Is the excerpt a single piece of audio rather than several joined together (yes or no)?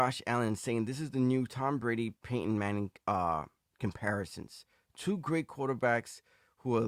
yes